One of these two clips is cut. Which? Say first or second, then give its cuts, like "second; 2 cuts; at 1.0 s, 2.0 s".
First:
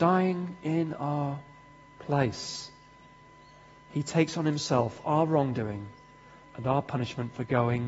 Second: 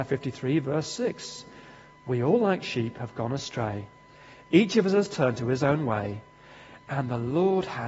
first; 1 cut; at 6.4 s